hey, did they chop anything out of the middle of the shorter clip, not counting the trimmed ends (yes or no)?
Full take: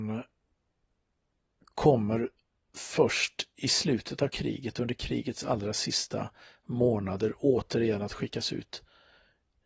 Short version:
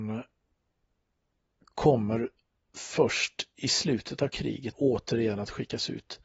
yes